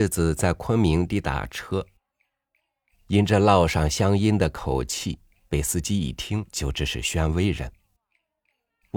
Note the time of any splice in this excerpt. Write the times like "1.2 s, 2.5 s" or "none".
1.1 s